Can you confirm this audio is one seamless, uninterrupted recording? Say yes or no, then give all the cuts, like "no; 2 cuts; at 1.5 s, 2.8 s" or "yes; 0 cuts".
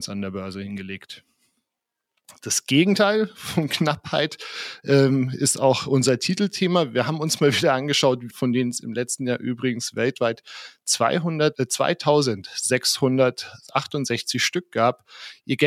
no; 2 cuts; at 8.3 s, 11.5 s